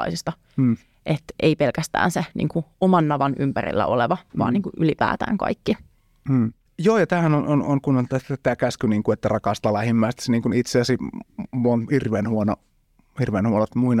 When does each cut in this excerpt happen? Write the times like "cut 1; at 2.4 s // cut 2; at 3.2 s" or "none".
none